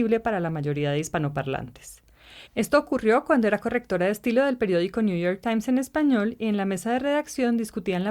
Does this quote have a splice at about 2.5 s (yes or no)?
yes